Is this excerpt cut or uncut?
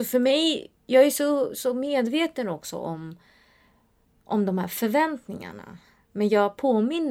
uncut